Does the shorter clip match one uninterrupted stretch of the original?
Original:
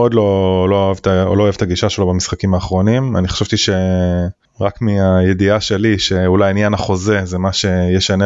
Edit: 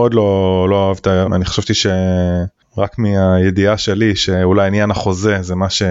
no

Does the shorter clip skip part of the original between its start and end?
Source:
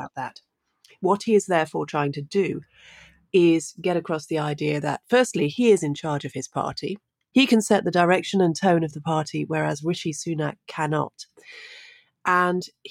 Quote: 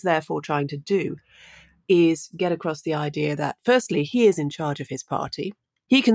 no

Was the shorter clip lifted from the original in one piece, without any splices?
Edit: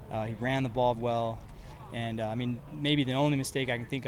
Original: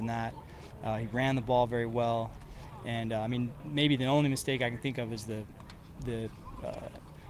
no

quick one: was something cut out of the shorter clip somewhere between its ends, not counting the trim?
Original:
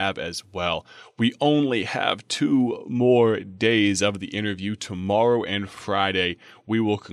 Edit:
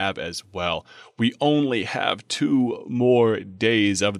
no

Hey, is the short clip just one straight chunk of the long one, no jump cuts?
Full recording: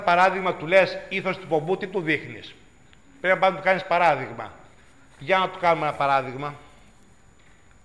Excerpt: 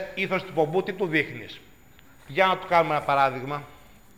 no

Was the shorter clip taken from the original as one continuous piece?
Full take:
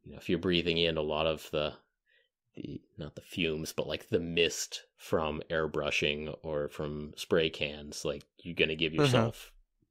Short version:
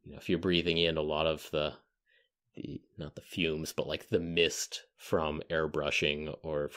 yes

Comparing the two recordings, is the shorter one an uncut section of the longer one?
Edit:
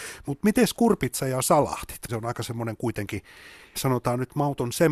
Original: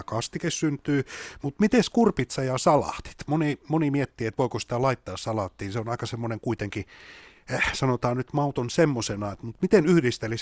no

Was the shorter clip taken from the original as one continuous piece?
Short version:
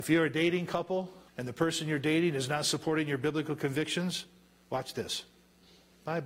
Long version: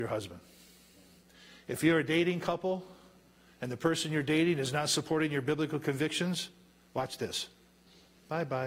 no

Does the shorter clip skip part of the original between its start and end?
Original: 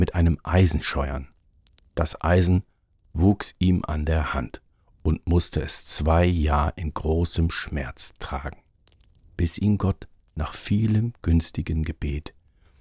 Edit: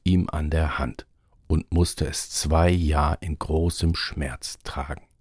no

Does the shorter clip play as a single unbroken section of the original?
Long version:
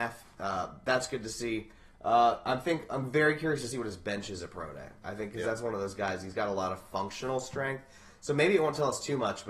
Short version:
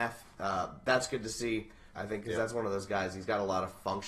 no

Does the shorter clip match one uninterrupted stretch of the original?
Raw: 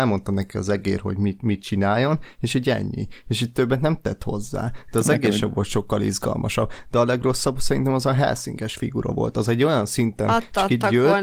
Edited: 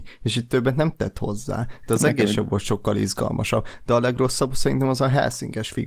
yes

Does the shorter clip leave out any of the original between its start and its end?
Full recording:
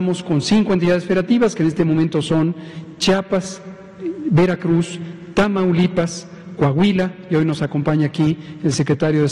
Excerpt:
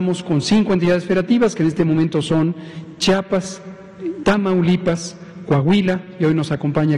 yes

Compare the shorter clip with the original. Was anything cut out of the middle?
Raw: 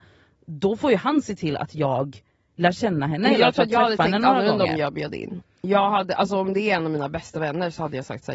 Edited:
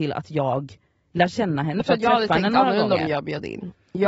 yes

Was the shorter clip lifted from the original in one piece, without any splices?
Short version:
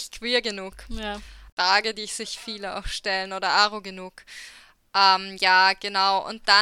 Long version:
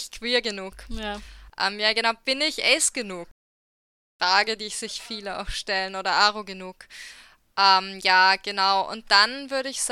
no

